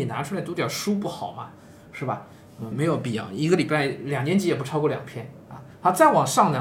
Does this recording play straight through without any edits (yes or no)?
no